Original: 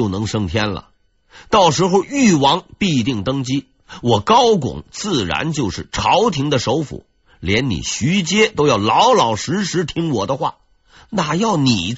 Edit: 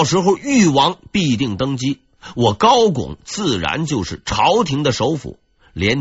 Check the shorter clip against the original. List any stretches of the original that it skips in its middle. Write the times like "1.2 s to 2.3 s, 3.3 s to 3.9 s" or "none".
none